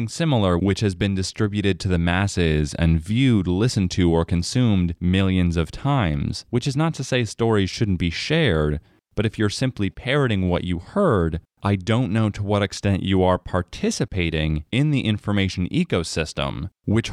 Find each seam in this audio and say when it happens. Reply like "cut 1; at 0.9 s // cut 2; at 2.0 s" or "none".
none